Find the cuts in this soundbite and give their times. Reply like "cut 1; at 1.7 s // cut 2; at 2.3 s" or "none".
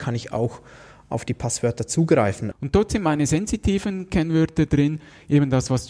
cut 1; at 2.5 s